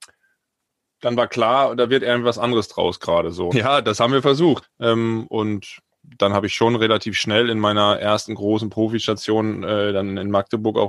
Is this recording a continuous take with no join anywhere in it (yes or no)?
no